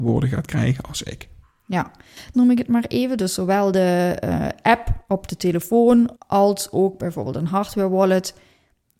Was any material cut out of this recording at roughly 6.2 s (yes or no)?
yes